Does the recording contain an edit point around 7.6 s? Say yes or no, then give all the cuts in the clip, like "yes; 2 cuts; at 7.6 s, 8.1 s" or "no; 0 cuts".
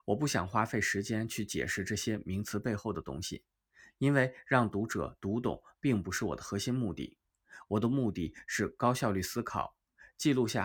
no; 0 cuts